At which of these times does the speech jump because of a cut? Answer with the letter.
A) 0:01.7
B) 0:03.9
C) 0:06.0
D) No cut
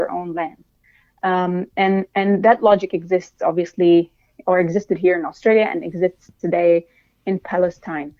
D